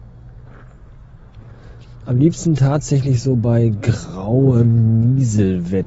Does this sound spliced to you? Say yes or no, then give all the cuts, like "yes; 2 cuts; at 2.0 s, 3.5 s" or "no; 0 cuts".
no; 0 cuts